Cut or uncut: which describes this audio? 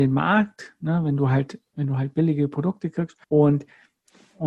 cut